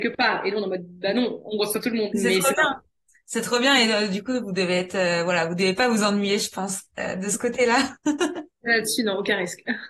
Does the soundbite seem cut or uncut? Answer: cut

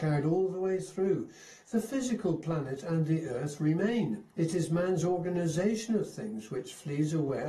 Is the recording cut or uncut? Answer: cut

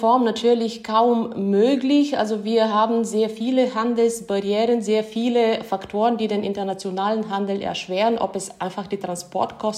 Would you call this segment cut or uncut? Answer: uncut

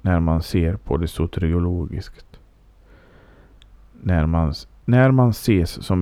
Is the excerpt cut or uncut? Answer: uncut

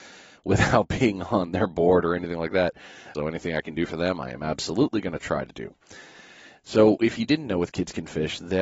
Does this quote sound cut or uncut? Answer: cut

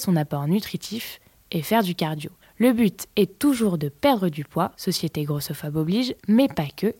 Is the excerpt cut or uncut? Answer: uncut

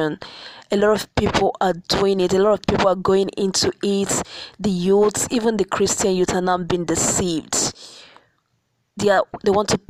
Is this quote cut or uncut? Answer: uncut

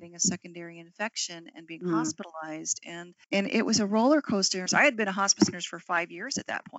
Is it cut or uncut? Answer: cut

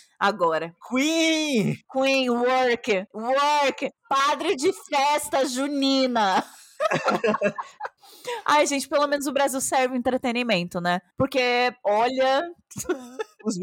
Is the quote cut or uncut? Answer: uncut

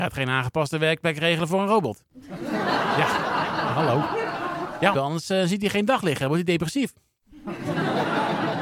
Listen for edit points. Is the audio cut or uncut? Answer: cut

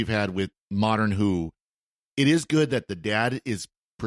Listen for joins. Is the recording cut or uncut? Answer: uncut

